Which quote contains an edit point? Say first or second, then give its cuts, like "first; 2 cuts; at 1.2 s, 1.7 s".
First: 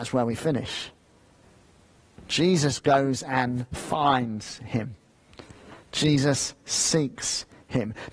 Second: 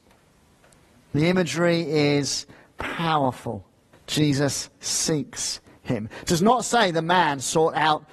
second; 1 cut; at 3.9 s